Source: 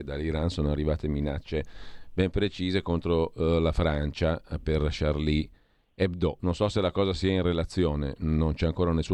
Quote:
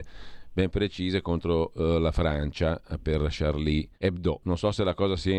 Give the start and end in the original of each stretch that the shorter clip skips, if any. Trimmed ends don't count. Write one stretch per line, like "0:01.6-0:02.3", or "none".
0:05.6-0:05.9